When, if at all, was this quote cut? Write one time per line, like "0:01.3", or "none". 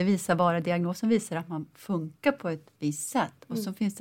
none